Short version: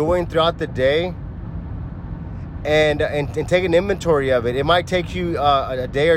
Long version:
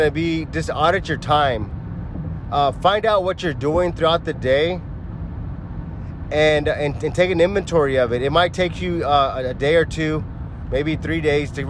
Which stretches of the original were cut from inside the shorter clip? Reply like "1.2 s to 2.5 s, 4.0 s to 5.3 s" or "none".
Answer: none